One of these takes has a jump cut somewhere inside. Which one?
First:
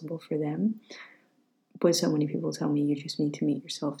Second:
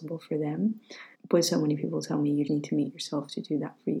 second; 2 cuts; at 1.1 s, 2.5 s

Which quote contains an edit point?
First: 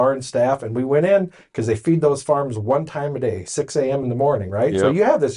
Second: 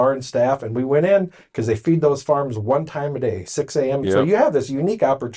second; 1 cut; at 4.0 s

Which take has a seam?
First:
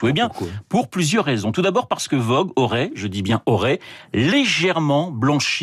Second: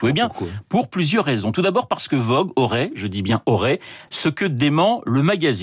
second; 1 cut; at 4.1 s

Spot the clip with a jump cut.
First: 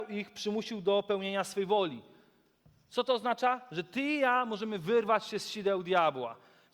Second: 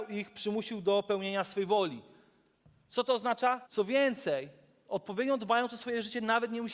second; 1 cut; at 3.7 s

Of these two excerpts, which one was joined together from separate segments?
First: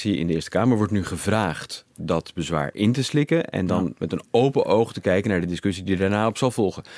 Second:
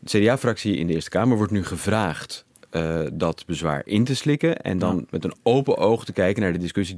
first; 1 cut; at 2.0 s

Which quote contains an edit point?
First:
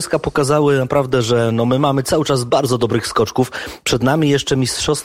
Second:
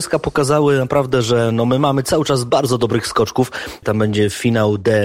second; 1 cut; at 3.8 s

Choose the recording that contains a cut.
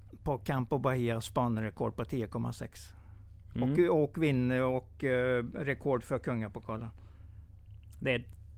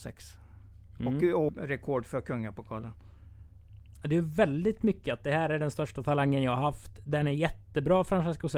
second; 2 cuts; at 1.5 s, 4.0 s

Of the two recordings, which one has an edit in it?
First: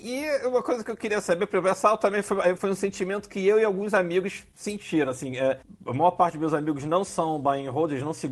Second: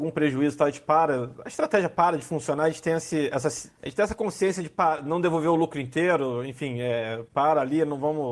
first; 1 cut; at 2.6 s

